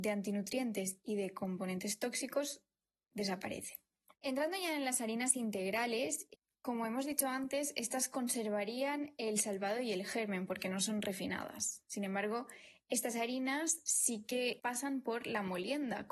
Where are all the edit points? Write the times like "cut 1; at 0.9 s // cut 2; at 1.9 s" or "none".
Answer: none